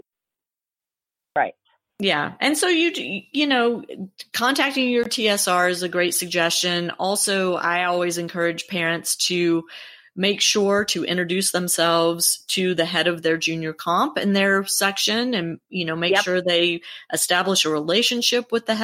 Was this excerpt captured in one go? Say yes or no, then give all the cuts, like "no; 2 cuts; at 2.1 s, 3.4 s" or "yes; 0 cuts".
yes; 0 cuts